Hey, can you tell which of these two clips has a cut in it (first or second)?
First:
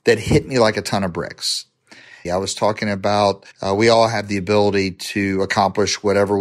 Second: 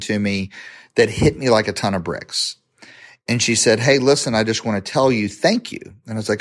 first